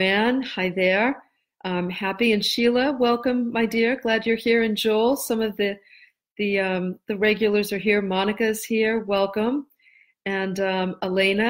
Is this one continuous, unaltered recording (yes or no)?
yes